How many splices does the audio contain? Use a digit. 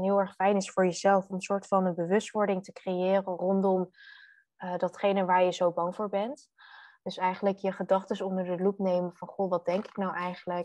0